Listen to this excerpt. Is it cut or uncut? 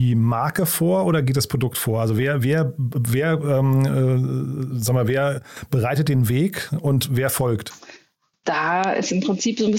uncut